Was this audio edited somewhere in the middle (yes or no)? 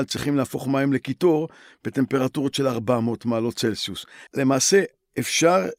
yes